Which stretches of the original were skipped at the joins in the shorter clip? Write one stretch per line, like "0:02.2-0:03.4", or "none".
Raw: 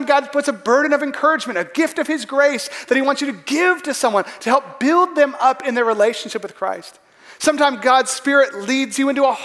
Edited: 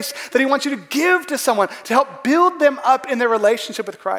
none